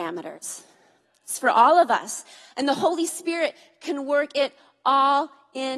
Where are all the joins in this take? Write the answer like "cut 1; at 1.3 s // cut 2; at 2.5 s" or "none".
none